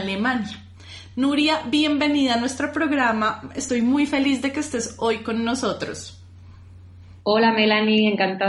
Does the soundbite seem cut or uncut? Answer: uncut